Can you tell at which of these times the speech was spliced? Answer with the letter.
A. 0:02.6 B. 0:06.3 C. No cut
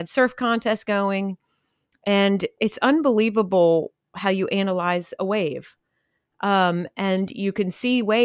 A